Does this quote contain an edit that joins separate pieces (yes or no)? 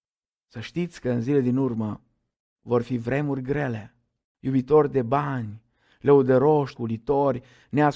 yes